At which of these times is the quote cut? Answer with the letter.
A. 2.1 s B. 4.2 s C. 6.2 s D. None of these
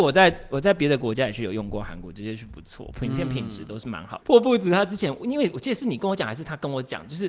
B